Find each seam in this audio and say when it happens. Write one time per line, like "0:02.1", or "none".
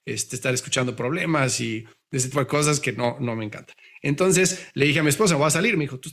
0:02.3

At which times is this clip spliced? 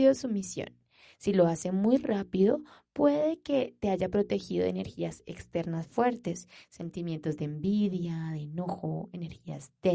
none

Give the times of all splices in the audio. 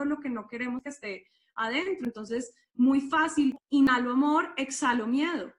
0:03.6

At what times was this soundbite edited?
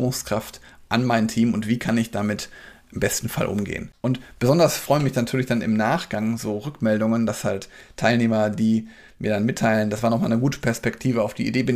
none

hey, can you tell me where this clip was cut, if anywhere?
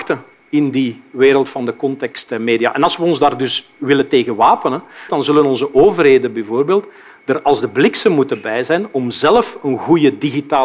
0:05.1

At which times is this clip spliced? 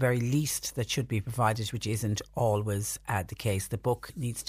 none

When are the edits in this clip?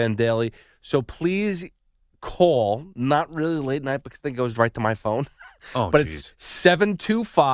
none

